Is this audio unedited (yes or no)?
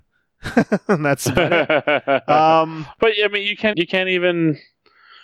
no